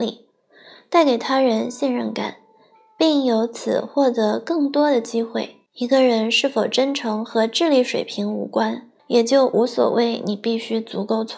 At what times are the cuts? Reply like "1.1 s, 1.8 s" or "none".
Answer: 5.7 s, 9.0 s